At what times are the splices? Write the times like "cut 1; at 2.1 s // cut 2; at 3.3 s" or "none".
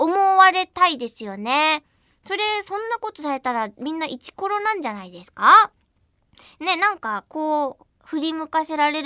none